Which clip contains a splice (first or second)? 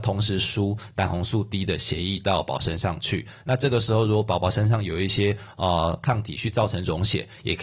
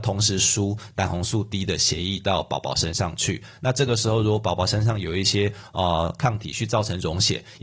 first